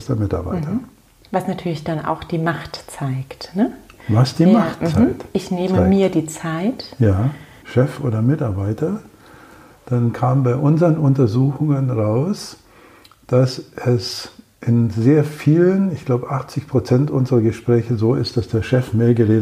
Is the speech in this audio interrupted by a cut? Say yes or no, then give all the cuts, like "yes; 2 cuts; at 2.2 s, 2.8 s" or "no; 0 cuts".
yes; 1 cut; at 7.6 s